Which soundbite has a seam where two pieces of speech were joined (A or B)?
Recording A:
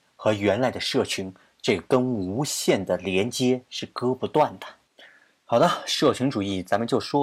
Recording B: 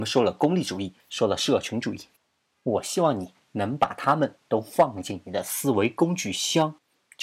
B